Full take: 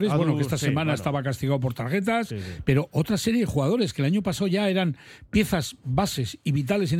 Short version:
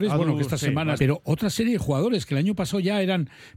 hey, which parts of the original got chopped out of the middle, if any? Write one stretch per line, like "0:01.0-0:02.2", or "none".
0:01.0-0:02.6